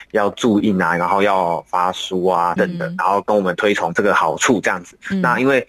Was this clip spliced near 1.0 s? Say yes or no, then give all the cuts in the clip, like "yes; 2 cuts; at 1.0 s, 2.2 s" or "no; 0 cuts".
no; 1 cut; at 2.6 s